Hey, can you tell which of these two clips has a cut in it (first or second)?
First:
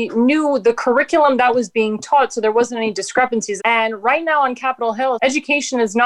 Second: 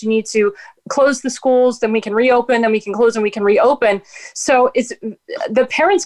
first